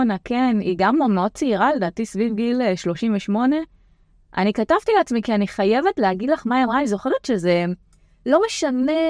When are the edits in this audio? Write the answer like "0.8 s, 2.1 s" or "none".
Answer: none